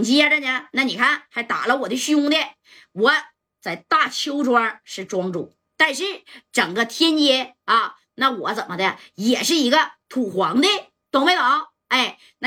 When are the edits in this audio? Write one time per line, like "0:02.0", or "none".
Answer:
none